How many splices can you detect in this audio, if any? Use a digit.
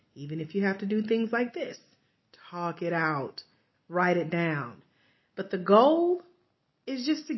1